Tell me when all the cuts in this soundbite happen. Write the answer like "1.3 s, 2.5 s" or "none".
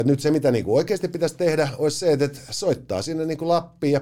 none